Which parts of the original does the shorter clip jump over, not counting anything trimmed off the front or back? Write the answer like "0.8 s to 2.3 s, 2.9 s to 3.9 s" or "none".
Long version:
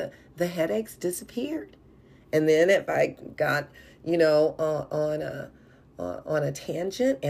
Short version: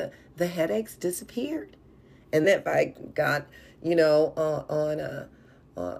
2.4 s to 2.7 s